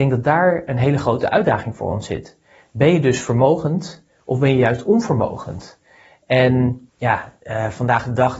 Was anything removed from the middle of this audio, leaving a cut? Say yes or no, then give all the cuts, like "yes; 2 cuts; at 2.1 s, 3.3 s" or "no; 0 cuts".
yes; 1 cut; at 6.9 s